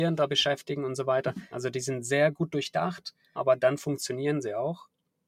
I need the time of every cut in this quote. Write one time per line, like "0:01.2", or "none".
0:01.5
0:03.4